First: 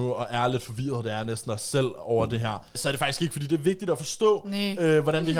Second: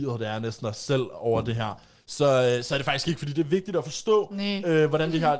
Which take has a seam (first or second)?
first